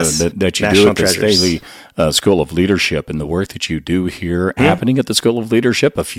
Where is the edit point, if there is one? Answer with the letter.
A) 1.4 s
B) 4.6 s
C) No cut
B